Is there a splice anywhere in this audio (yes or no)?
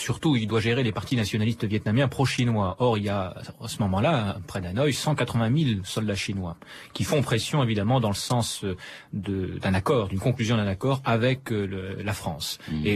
no